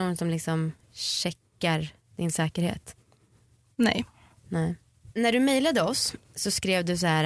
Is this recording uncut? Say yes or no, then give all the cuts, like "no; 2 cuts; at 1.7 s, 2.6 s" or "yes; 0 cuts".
yes; 0 cuts